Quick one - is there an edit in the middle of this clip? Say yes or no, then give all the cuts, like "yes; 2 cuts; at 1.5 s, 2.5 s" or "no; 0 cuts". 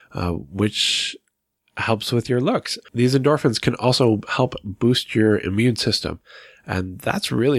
yes; 1 cut; at 2.8 s